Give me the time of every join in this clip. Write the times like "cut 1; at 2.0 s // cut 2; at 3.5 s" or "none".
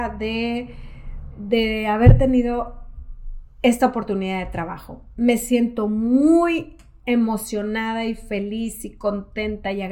cut 1; at 1.3 s